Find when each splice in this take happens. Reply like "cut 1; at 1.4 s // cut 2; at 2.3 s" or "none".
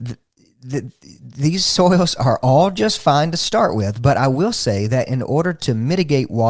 none